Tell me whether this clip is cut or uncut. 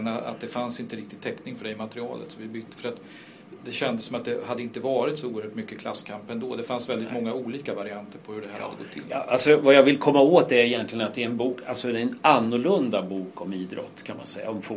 uncut